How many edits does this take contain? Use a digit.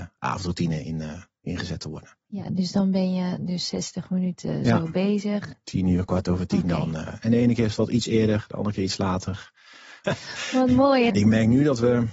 2